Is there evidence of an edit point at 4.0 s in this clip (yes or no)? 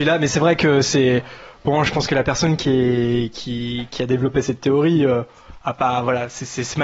no